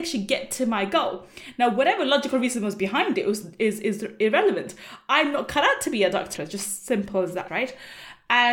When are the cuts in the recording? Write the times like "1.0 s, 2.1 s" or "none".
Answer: 6.3 s, 7.5 s

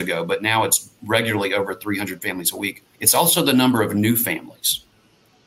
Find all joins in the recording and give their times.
2.9 s

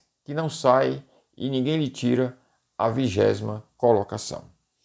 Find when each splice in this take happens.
none

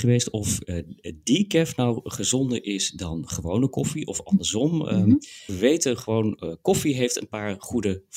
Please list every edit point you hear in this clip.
5.5 s

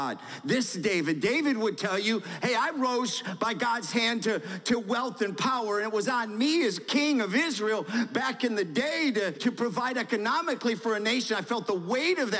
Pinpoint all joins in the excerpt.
9.3 s

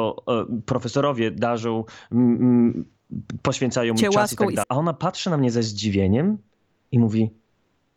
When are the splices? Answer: 4.6 s

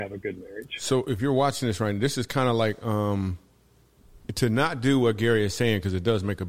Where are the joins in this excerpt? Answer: none

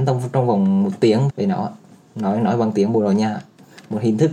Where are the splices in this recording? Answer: 1.3 s

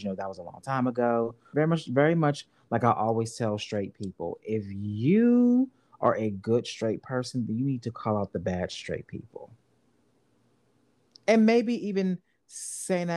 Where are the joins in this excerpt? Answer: 1.5 s

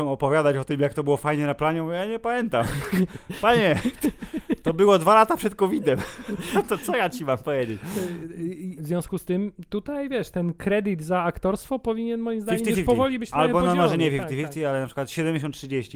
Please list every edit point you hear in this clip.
8.8 s

